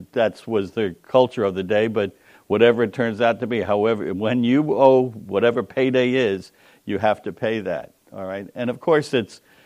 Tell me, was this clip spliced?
no; 0 cuts

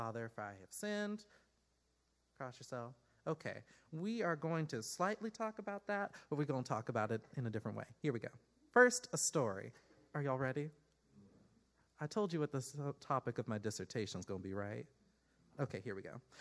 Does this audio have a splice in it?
no; 0 cuts

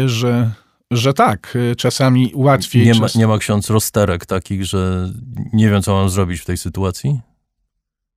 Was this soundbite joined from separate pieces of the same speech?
no; 0 cuts

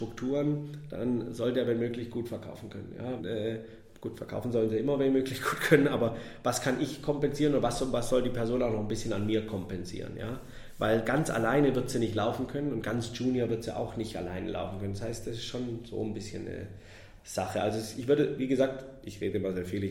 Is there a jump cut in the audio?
yes; 1 cut; at 3.2 s

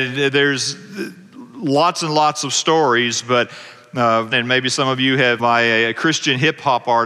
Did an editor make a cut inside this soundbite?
yes; 2 cuts; at 4.3 s, 5.4 s

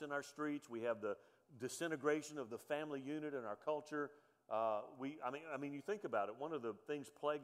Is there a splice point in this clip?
no; 0 cuts

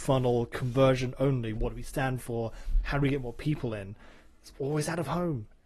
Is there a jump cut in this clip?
yes; 1 cut; at 1.6 s

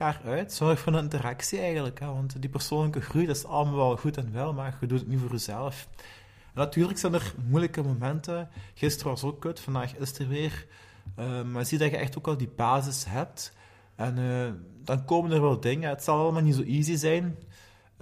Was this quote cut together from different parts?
no; 0 cuts

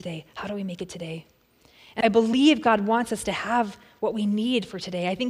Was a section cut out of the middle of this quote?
yes; 1 cut; at 2.0 s

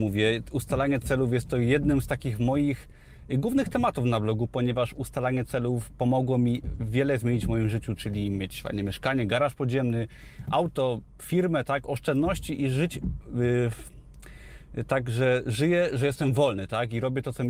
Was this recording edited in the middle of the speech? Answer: yes; 1 cut; at 13.2 s

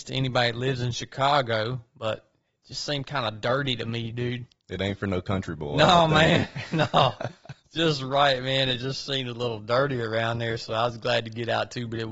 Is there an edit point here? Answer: no; 0 cuts

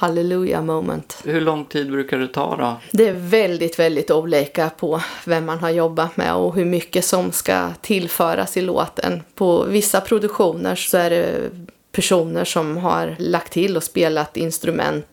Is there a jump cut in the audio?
no; 0 cuts

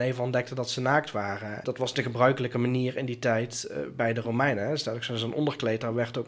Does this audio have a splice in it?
yes; 1 cut; at 1.6 s

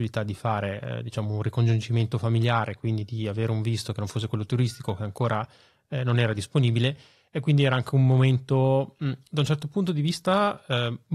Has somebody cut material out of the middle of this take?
no; 0 cuts

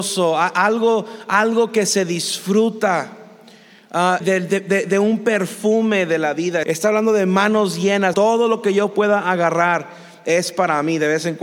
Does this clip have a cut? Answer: yes; 3 cuts; at 4.2 s, 6.6 s, 8.1 s

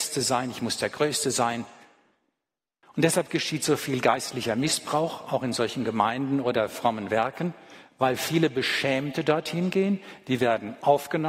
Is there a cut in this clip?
yes; 1 cut; at 2.8 s

